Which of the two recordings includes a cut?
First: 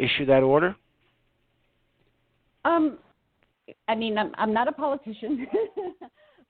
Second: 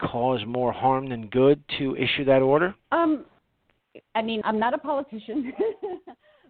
second; 2 cuts; at 2.8 s, 4.4 s

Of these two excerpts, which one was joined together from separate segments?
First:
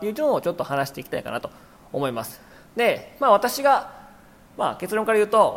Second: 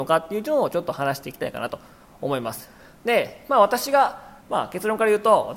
second; 1 cut; at 4.4 s

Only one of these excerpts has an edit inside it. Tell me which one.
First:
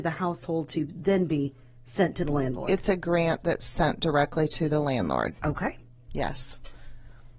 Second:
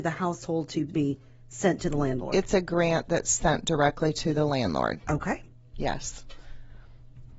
second; 1 cut; at 0.9 s

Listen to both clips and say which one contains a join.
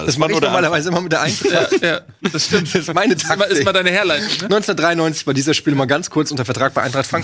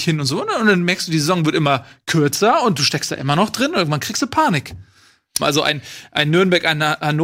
second; 1 cut; at 5.4 s

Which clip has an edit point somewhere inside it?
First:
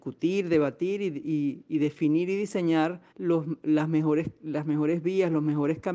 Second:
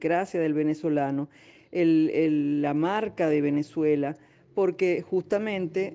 first; 1 cut; at 3.1 s

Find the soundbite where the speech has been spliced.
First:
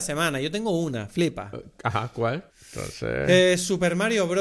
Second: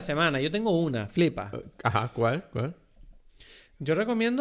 first; 1 cut; at 2.5 s

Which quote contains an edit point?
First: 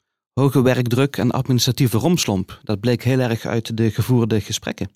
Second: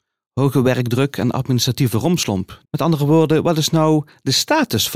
second; 1 cut; at 2.6 s

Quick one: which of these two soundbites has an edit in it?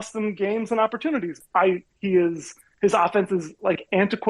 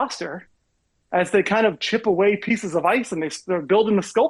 first; 1 cut; at 1.4 s

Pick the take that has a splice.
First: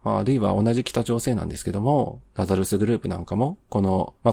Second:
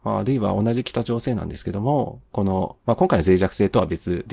second; 1 cut; at 2.3 s

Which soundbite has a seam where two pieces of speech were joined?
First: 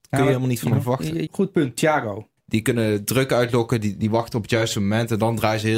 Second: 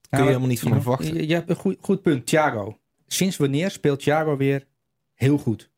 first; 2 cuts; at 1.3 s, 2.4 s

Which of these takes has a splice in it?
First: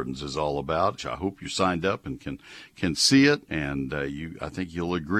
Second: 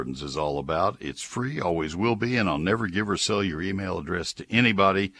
first; 2 cuts; at 1.0 s, 3.5 s

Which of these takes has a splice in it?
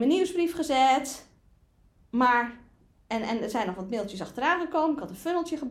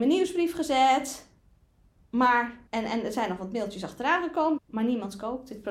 second; 2 cuts; at 2.7 s, 4.6 s

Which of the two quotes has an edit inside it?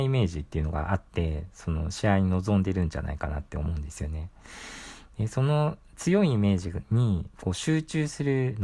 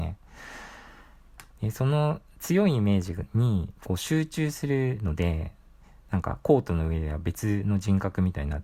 second; 1 cut; at 1.5 s

